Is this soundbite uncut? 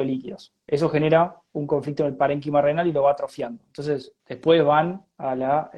yes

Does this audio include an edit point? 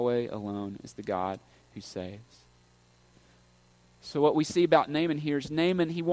no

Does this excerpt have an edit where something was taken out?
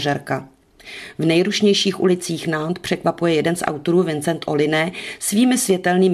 no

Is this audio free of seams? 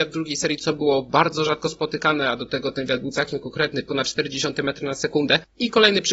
yes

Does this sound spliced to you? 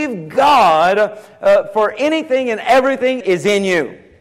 yes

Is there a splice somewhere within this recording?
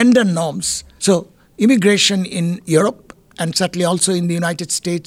yes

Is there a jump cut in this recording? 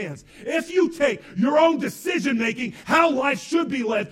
no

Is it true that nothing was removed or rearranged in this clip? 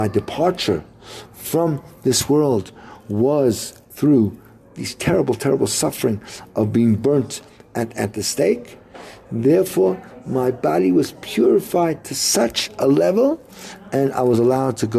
yes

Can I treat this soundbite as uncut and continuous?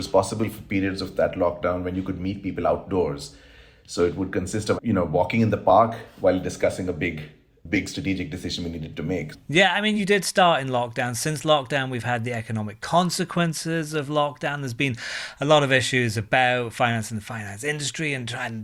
no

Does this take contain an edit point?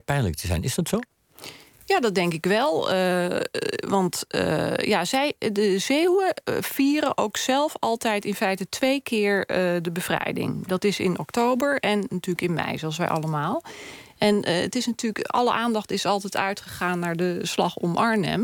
no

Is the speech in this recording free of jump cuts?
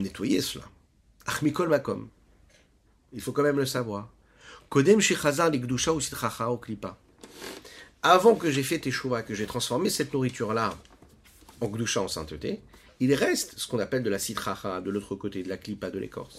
yes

